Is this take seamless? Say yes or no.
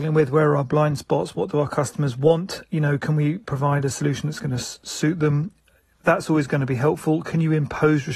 yes